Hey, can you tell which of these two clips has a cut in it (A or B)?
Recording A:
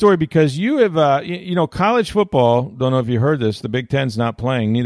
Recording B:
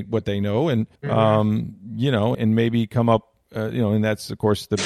B